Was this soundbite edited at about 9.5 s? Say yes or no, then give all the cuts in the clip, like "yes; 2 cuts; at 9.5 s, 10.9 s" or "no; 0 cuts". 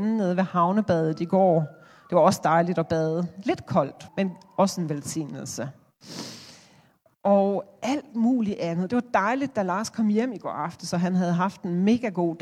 no; 1 cut; at 4.1 s